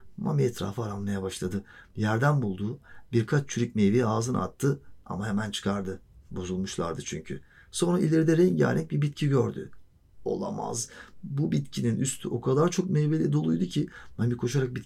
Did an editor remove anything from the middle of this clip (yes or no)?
no